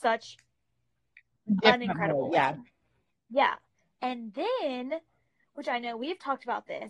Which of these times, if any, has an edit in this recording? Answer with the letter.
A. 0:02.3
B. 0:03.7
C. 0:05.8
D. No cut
D